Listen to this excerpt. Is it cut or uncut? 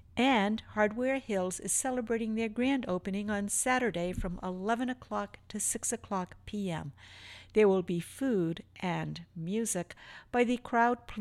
uncut